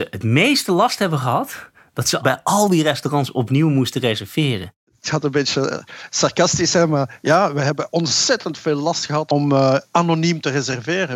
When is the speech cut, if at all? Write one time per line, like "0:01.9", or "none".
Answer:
none